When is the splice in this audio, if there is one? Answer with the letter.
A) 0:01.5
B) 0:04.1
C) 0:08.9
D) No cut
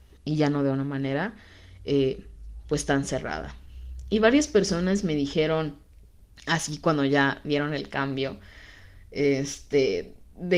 D